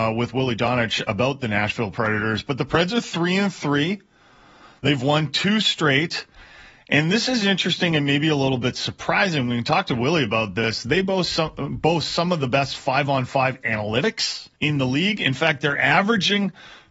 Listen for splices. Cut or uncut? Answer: cut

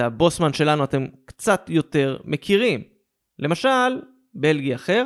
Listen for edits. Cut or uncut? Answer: cut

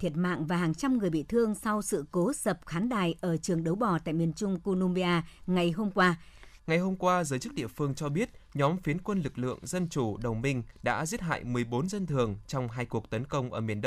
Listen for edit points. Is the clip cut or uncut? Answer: cut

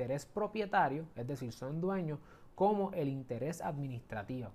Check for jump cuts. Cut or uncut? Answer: uncut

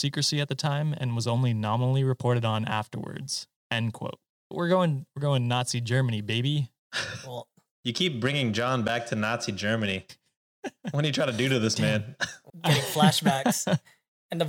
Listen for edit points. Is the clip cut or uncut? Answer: cut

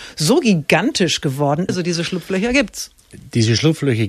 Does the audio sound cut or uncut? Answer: cut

